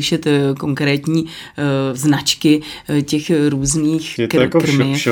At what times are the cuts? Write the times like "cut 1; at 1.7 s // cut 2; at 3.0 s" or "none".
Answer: cut 1; at 4.2 s